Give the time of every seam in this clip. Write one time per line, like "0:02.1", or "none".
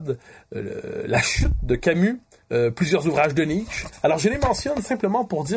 0:02.4